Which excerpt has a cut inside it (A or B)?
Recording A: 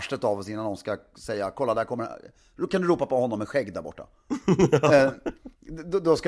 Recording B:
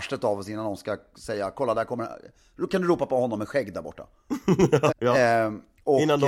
B